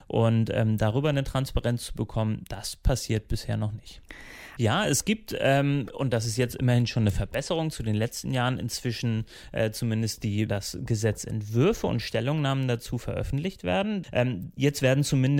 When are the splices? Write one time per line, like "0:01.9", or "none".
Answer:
0:04.6
0:10.5
0:14.0